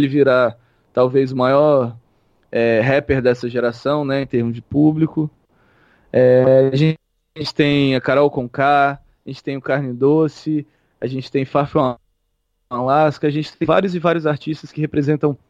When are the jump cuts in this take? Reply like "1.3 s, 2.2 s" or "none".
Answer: none